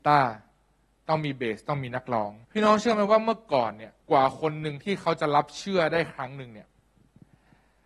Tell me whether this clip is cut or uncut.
cut